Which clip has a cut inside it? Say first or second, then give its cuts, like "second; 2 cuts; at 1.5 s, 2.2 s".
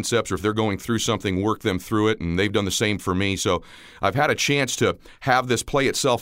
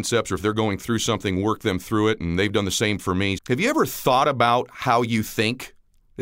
second; 1 cut; at 3.4 s